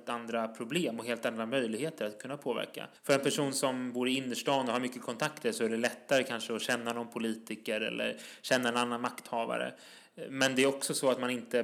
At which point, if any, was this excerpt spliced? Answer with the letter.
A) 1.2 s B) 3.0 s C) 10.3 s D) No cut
B